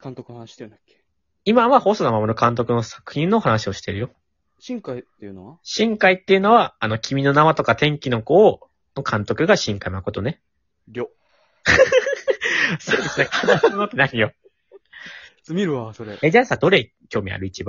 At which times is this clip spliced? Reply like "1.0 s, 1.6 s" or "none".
13.3 s, 16.6 s

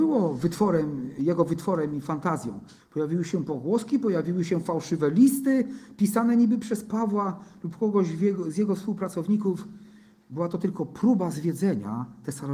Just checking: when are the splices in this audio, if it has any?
2.8 s

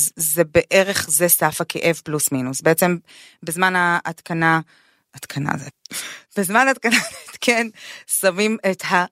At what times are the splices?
none

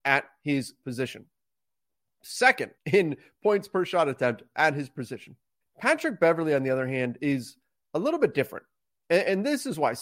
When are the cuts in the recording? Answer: 2.8 s, 5.6 s

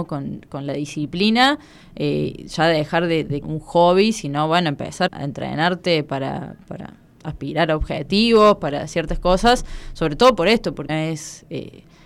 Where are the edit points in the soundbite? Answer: 3.4 s, 5.1 s, 10.9 s

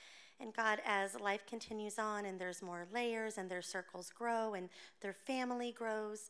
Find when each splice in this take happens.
none

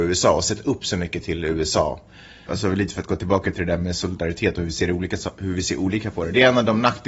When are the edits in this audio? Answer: 2.5 s

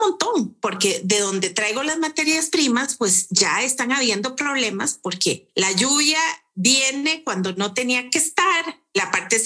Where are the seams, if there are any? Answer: none

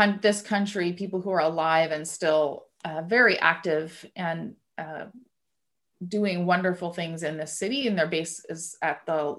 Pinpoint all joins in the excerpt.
none

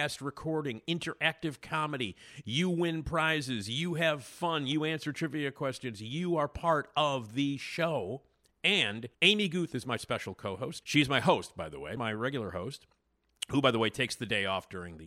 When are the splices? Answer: 9.1 s, 10.8 s, 12.0 s

